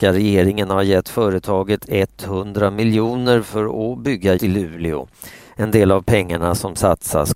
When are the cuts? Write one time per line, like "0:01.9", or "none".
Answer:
0:04.4

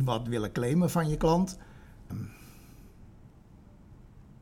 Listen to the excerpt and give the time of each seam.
0:02.1

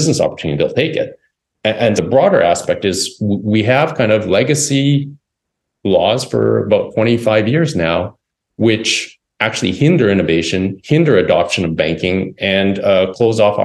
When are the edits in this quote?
0:02.0

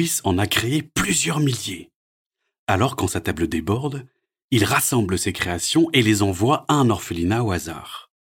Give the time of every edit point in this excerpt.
none

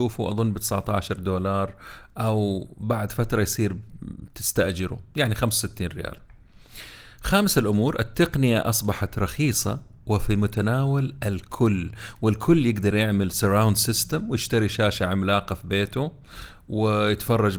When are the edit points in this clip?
none

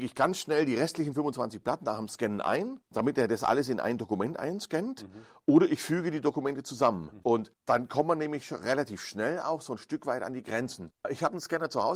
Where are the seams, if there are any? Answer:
0:07.2

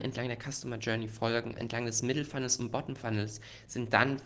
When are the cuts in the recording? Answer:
0:01.6

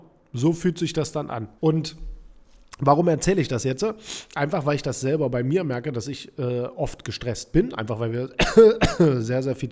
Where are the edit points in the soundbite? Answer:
0:01.6

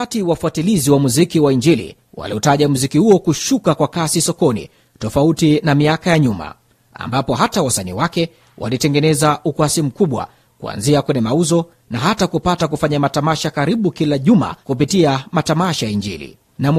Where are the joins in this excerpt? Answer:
0:14.6

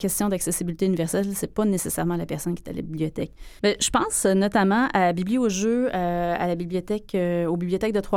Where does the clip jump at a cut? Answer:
0:03.6

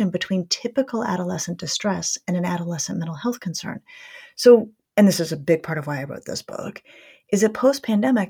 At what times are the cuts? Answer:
0:04.9

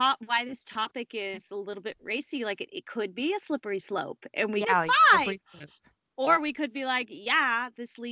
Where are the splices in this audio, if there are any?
0:04.6

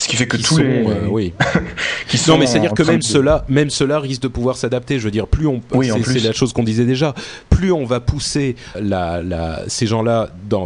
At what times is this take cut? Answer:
0:08.7

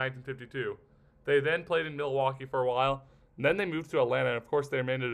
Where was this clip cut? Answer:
none

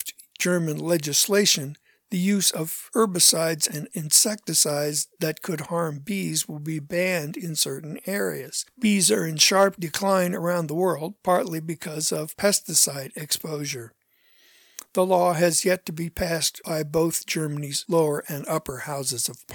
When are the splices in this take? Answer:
none

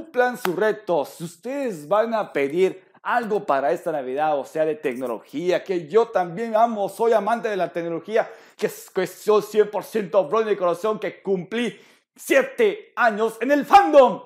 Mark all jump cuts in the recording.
0:05.6

